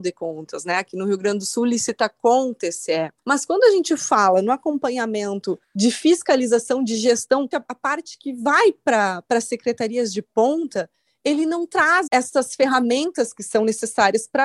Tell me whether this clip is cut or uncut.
cut